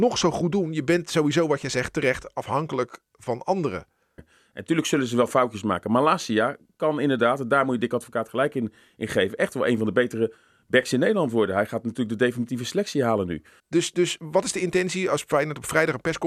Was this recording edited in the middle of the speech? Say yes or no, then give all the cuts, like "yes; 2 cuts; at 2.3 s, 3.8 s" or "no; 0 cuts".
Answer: yes; 2 cuts; at 4.2 s, 13.6 s